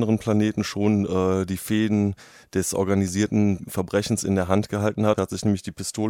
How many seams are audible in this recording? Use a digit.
1